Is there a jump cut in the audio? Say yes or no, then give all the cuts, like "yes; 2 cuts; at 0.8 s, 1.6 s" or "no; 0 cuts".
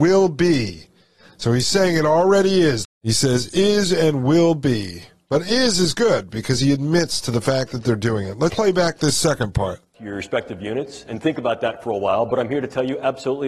yes; 2 cuts; at 2.8 s, 8.5 s